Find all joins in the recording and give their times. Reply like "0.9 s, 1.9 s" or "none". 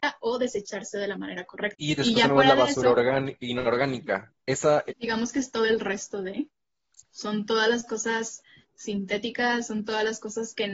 4.9 s